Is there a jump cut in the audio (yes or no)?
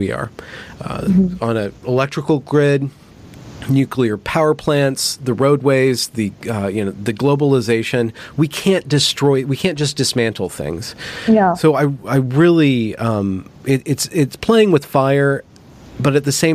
no